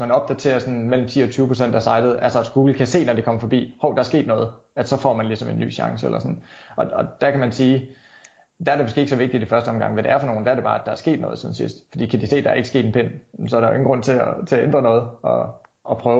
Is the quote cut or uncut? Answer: uncut